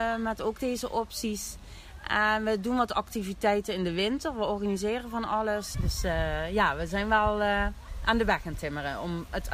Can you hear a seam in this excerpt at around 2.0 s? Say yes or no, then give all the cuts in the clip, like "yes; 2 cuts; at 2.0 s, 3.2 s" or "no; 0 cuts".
no; 1 cut; at 5.7 s